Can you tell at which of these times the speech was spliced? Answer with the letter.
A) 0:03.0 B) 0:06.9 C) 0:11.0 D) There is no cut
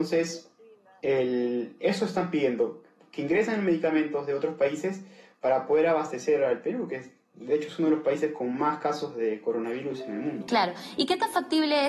D